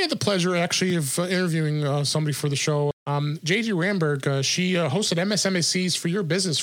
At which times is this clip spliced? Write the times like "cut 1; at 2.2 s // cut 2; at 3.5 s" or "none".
cut 1; at 2.9 s